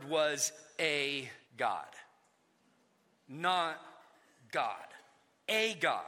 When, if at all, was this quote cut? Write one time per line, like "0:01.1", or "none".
0:01.4